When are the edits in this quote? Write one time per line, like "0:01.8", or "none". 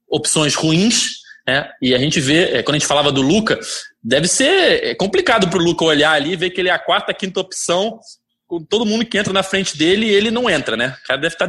none